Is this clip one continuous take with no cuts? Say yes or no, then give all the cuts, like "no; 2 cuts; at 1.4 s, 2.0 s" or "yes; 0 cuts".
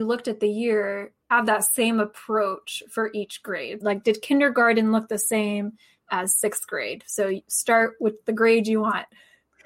no; 2 cuts; at 1.2 s, 3.8 s